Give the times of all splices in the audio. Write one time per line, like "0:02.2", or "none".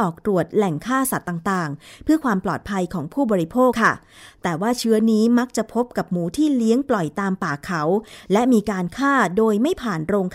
0:03.7